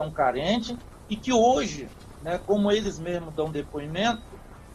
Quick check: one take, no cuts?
yes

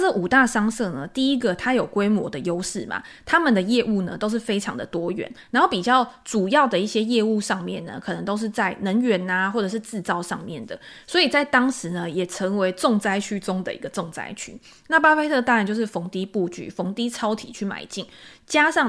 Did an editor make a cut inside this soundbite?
no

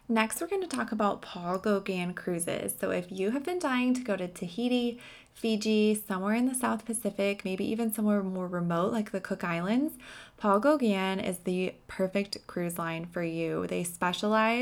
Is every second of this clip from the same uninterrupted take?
yes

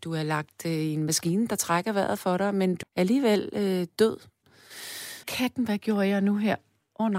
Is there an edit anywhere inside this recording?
yes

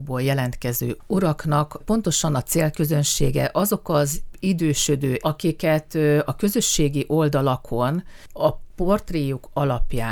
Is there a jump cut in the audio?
yes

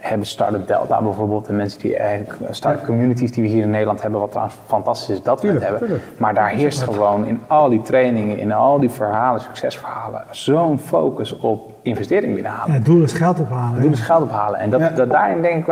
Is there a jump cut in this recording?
no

